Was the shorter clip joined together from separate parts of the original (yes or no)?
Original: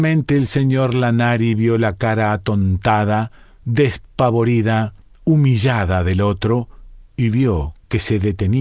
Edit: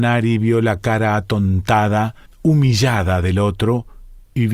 yes